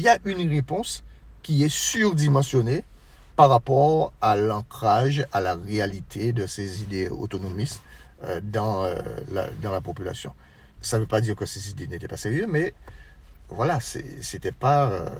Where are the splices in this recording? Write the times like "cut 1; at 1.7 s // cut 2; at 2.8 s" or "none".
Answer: cut 1; at 10.8 s